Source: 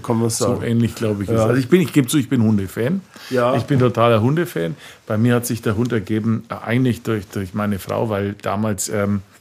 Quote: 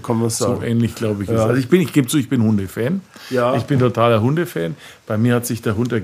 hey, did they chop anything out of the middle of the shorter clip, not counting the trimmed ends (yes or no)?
no